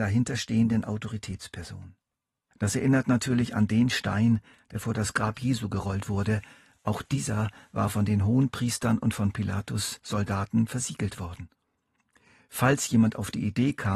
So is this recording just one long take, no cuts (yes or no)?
no